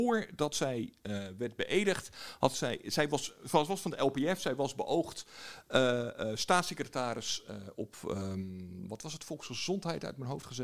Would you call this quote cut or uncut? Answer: uncut